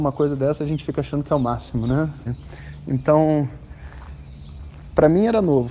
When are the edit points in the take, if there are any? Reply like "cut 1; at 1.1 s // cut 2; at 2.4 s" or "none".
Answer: cut 1; at 2.3 s